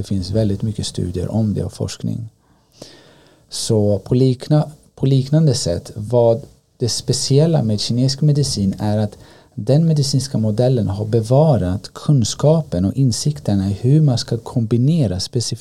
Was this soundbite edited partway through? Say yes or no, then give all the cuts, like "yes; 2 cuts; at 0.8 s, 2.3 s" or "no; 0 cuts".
no; 0 cuts